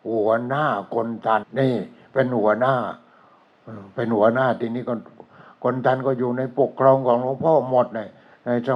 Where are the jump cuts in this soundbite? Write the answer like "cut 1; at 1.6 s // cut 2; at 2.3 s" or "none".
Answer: cut 1; at 1.4 s

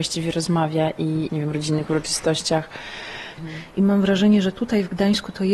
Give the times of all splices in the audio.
cut 1; at 1.3 s // cut 2; at 3.4 s

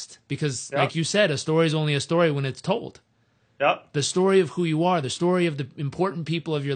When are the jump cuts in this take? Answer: none

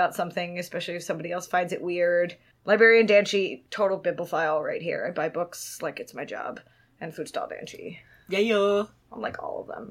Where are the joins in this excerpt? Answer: none

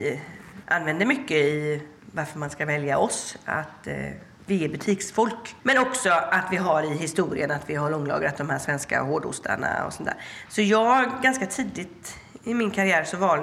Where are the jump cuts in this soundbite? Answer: none

